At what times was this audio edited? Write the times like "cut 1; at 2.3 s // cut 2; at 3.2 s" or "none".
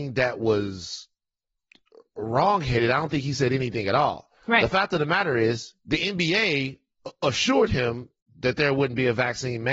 cut 1; at 4.4 s // cut 2; at 5.8 s